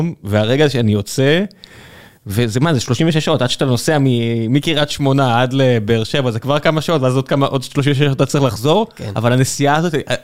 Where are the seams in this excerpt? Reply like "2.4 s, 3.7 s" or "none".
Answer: none